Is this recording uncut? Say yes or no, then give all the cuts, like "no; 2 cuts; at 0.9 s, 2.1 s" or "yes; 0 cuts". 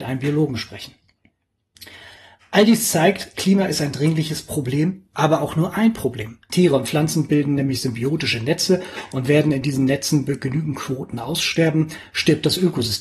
no; 1 cut; at 6.5 s